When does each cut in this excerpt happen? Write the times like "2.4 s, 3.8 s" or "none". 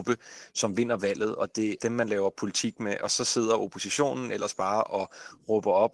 1.8 s